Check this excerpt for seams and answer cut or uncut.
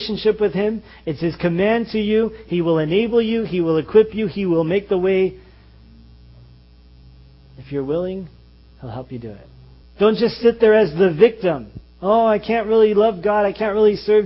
cut